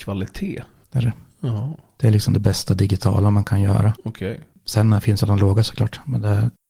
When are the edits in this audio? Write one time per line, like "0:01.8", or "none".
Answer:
none